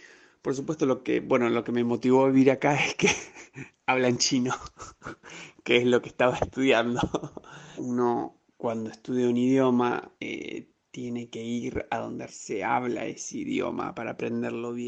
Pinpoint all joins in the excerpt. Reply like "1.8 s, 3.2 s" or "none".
7.8 s, 10.2 s, 12.3 s